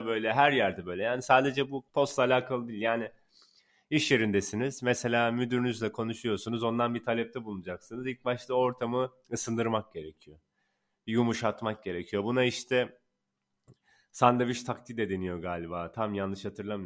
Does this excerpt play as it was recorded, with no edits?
no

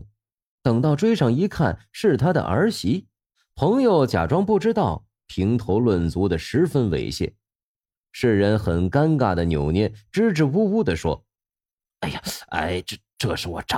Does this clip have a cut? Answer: yes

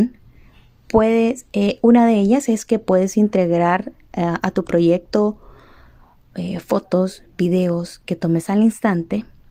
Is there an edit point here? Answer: no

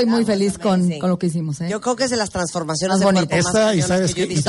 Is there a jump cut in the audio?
no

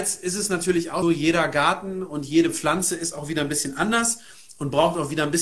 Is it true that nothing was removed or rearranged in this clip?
no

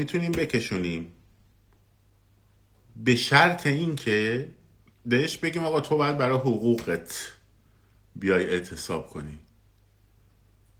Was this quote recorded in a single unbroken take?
yes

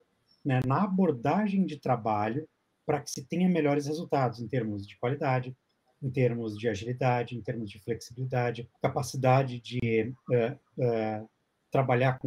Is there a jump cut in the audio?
yes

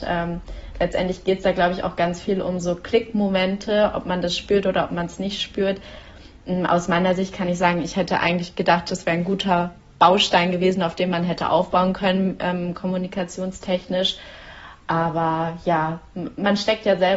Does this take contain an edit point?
no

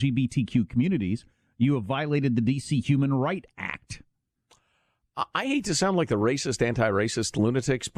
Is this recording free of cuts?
yes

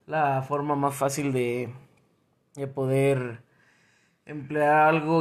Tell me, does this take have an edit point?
no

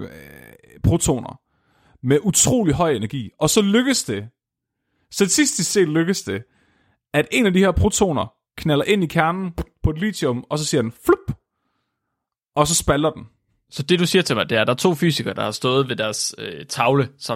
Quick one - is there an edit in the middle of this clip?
no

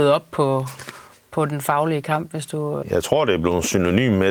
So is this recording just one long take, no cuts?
no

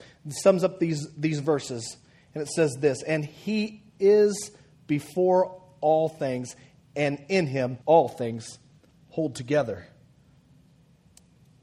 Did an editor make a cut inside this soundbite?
yes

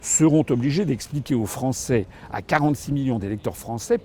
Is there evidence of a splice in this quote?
no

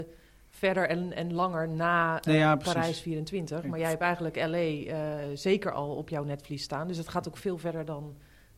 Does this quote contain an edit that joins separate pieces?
no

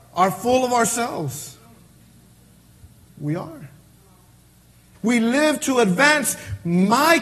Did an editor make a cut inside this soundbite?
yes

